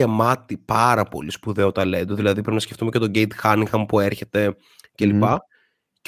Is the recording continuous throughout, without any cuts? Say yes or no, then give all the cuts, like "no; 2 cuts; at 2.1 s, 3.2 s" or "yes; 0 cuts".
yes; 0 cuts